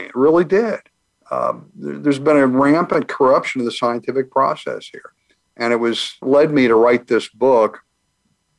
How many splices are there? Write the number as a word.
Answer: one